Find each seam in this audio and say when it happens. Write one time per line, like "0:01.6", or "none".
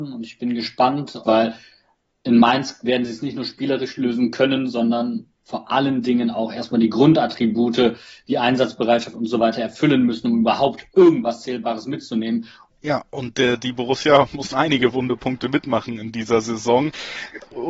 0:01.2
0:12.7
0:14.5